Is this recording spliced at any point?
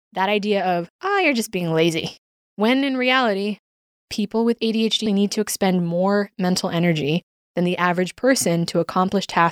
yes; 2 cuts; at 2.3 s, 5.1 s

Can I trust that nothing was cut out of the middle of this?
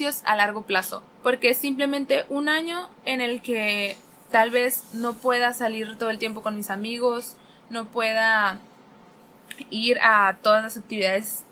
no; 1 cut; at 1.1 s

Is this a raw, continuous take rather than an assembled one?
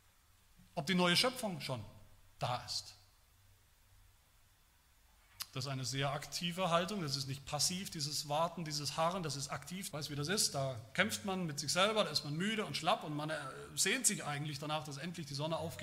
no; 1 cut; at 9.9 s

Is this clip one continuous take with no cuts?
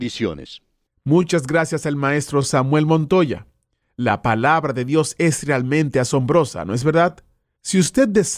no; 1 cut; at 3.8 s

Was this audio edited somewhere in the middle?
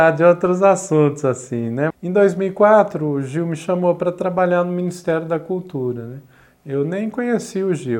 yes; 1 cut; at 1.9 s

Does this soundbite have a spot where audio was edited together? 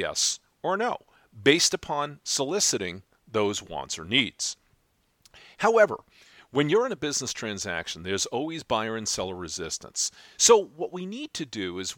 yes; 1 cut; at 10.4 s

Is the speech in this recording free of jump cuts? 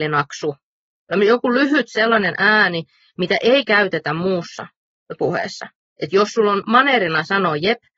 yes; 0 cuts

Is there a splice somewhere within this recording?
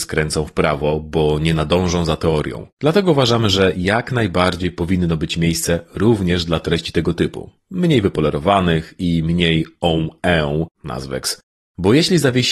yes; 2 cuts; at 2.7 s, 10.7 s

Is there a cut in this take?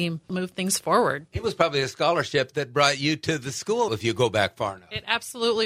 yes; 1 cut; at 3.9 s

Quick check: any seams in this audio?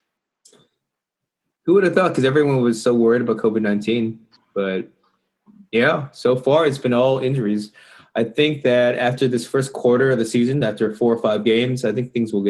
no; 0 cuts

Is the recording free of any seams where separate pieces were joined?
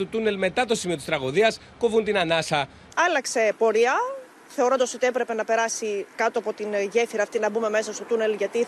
no; 2 cuts; at 2.9 s, 6.1 s

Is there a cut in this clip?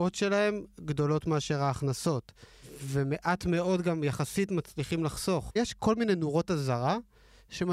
yes; 1 cut; at 5.5 s

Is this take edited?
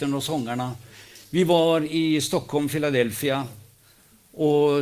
no; 0 cuts

